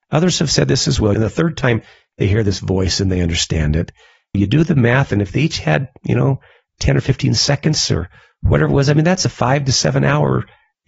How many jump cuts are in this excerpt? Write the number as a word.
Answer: two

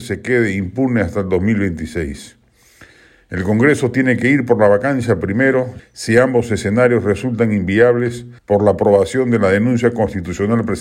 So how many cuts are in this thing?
two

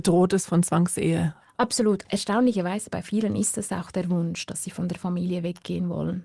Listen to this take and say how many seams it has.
one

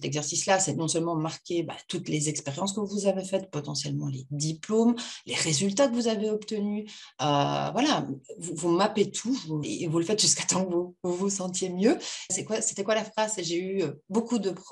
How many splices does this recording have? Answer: two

